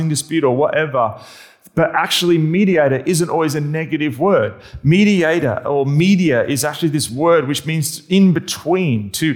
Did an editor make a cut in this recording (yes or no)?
no